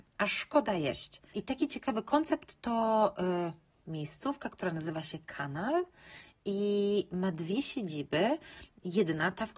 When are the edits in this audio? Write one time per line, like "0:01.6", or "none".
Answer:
0:01.3